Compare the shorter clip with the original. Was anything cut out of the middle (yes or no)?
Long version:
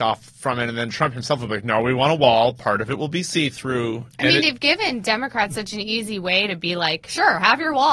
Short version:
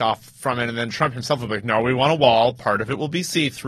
no